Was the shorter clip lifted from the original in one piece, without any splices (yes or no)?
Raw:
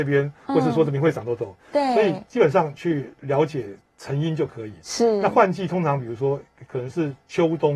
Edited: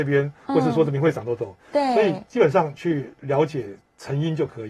yes